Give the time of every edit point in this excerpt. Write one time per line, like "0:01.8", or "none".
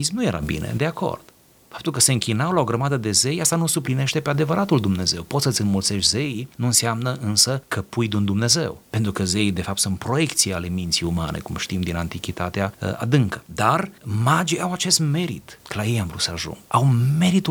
none